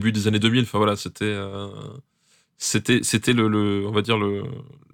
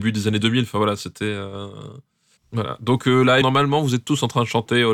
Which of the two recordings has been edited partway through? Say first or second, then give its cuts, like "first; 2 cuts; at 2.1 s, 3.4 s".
second; 2 cuts; at 2.4 s, 3.4 s